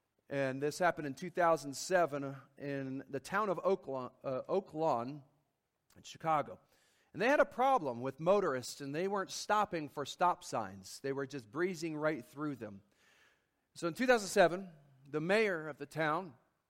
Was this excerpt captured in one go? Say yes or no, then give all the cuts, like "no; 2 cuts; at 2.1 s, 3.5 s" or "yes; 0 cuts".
yes; 0 cuts